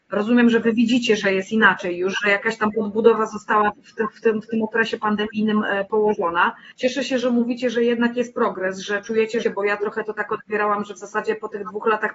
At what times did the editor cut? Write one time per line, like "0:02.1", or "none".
0:06.7
0:09.4